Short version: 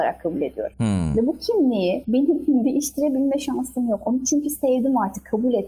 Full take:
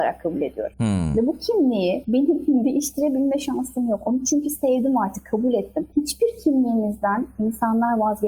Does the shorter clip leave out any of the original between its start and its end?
no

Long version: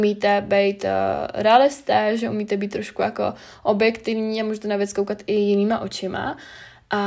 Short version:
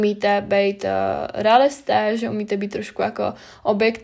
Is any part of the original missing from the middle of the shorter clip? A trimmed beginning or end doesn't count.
no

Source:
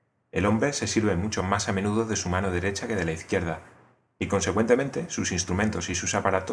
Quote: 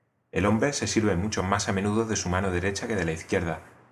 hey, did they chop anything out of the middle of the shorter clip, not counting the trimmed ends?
no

